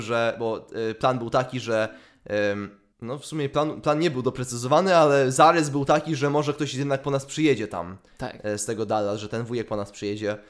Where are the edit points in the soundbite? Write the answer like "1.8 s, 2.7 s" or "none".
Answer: 2.9 s